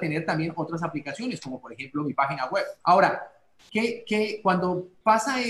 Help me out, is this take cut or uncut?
cut